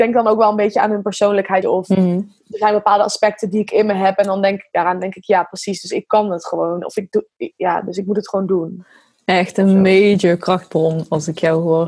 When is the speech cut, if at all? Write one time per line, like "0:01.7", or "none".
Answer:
0:01.6